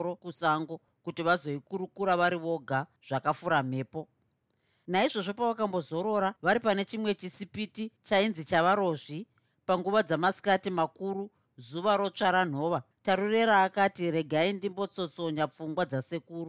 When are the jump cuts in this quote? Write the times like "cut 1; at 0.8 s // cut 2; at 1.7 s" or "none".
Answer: cut 1; at 12.9 s